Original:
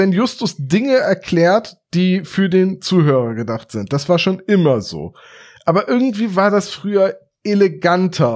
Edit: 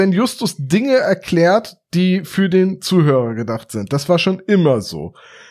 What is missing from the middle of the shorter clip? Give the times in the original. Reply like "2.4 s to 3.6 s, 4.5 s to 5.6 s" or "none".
none